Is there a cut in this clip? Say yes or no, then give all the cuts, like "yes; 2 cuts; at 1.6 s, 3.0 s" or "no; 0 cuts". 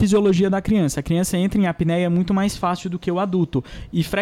no; 0 cuts